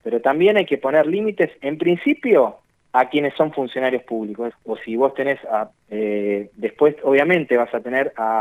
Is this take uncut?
no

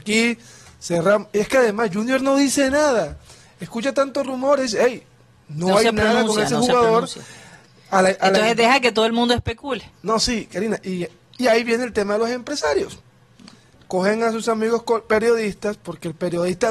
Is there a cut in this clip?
no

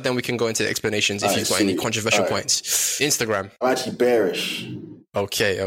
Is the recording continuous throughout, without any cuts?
yes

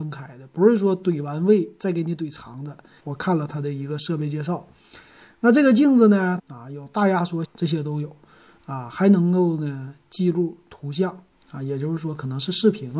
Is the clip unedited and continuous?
no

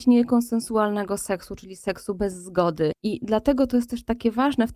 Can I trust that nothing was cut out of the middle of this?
no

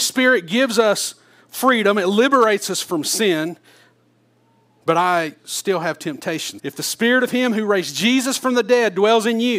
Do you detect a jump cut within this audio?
yes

